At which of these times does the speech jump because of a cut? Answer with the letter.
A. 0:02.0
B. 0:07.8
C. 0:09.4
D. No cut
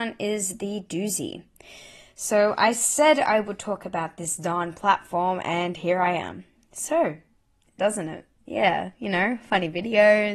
B